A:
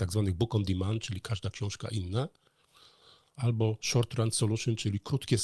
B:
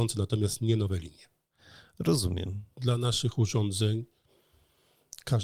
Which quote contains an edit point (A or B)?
B